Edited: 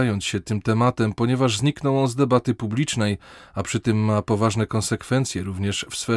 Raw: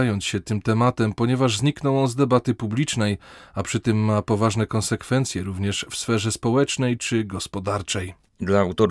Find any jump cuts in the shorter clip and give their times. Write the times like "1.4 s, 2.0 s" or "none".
none